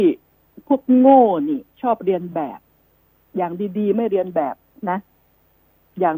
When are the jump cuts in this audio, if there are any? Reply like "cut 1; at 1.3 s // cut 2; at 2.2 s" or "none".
none